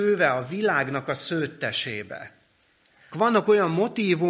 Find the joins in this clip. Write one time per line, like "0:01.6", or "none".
0:03.1